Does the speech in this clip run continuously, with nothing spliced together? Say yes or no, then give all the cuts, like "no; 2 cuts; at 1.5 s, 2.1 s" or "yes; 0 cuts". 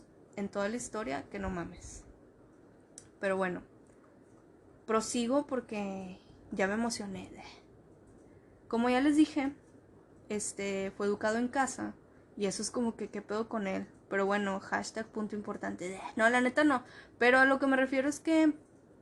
no; 1 cut; at 12.2 s